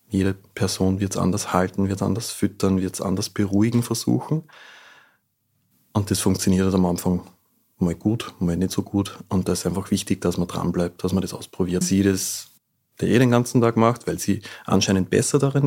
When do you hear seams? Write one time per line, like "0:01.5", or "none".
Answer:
0:11.8